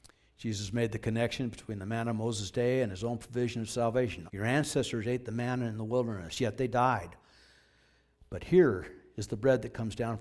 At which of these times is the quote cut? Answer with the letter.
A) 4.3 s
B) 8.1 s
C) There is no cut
A